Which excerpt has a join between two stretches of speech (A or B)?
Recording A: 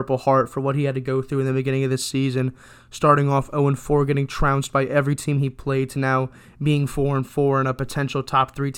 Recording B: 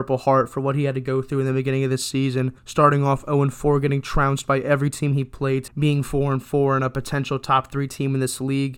B